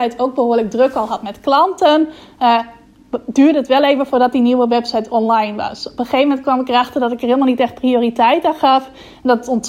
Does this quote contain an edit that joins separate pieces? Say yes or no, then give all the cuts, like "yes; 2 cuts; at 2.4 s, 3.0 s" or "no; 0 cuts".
no; 0 cuts